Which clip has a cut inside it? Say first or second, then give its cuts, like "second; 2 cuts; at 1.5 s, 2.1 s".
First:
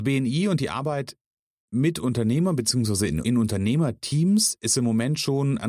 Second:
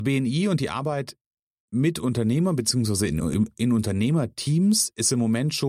first; 1 cut; at 3.2 s